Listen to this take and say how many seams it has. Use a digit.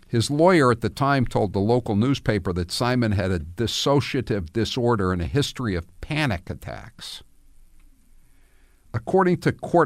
0